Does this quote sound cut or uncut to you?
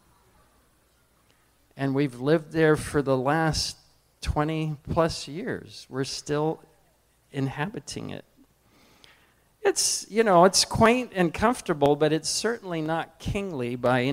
uncut